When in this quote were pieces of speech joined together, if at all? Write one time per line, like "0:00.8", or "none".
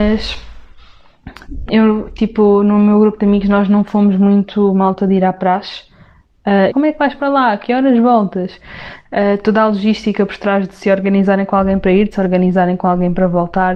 0:01.7
0:06.7